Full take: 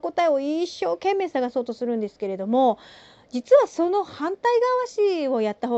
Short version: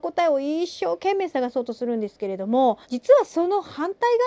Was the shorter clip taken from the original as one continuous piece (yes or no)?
no